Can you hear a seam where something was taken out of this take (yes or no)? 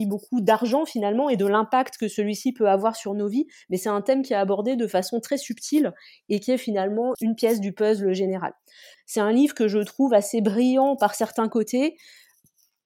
yes